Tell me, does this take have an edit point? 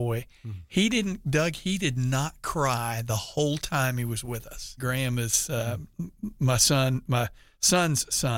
yes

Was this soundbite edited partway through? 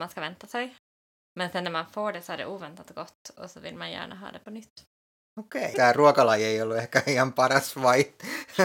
yes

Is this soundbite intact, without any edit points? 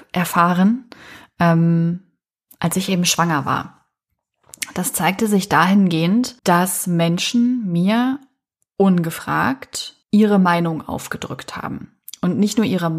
no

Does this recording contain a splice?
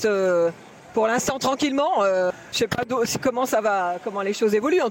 no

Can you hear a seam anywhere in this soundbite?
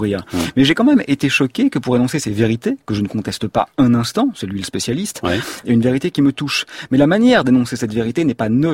yes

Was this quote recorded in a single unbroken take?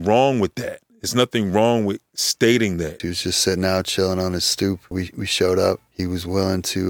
no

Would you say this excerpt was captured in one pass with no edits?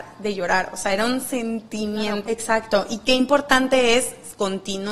no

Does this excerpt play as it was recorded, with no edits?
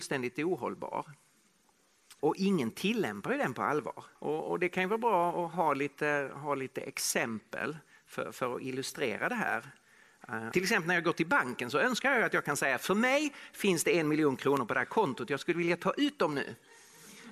no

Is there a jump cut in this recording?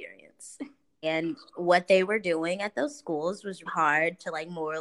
yes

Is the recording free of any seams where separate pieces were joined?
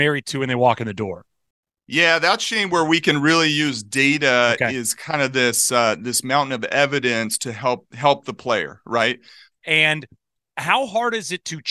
no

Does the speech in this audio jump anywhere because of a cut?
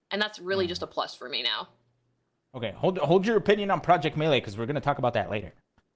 no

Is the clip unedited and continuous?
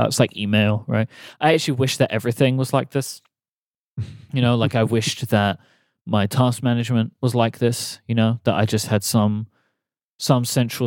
yes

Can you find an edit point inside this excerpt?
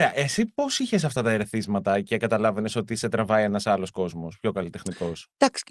no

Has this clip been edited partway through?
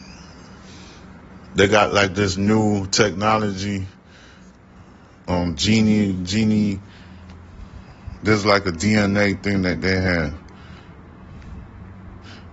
no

